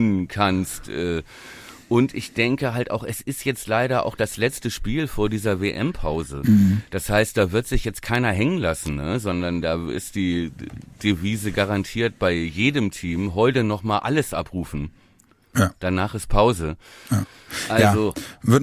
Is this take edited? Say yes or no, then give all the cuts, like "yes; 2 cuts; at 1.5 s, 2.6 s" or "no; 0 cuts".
no; 0 cuts